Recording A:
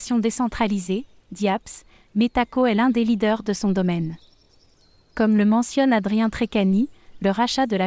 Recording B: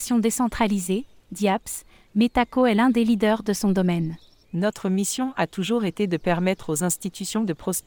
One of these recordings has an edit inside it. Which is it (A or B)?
B